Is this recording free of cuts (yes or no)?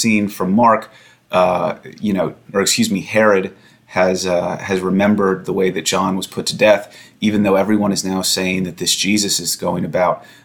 no